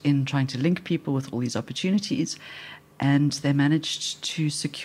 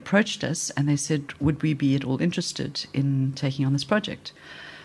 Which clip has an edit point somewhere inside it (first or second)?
first